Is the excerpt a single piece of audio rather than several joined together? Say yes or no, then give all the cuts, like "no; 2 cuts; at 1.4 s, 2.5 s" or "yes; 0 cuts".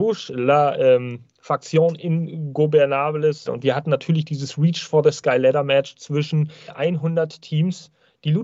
no; 2 cuts; at 3.5 s, 6.7 s